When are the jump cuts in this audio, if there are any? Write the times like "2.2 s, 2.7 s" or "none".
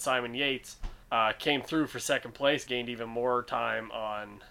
1.0 s, 2.7 s